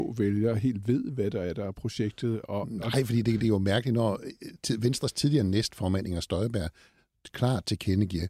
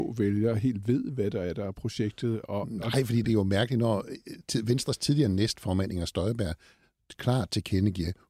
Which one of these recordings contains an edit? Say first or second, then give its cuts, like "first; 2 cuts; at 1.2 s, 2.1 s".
second; 1 cut; at 3.2 s